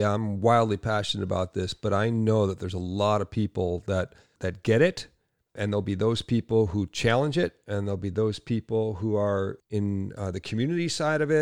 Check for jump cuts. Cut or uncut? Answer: uncut